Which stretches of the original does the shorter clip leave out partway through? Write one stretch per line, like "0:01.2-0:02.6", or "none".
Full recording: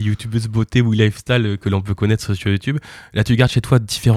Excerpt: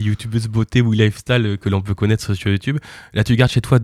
none